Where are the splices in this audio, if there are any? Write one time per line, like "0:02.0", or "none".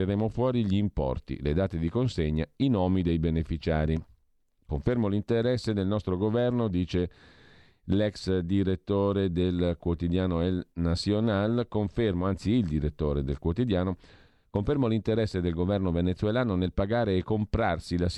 0:04.6

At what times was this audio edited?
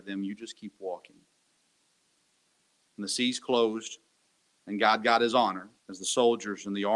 0:05.8

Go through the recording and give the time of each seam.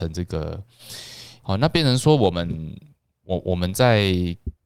0:01.4

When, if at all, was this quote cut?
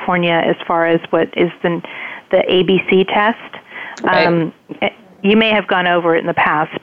none

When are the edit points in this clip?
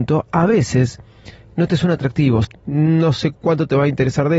0:02.4

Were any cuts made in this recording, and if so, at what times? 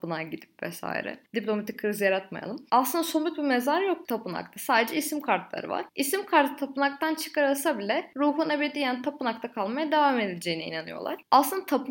0:02.7

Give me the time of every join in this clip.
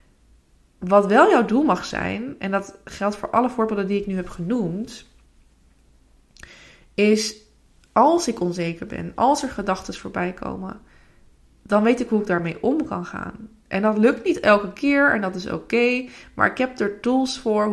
none

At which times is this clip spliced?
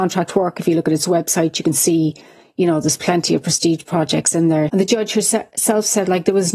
0:04.7

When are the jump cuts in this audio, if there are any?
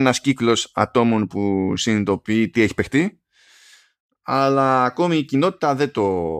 0:02.5

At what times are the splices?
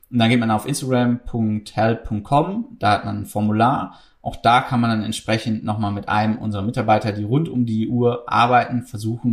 none

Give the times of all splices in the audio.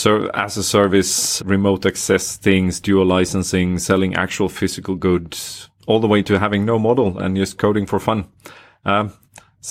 0:01.4
0:05.8
0:07.2

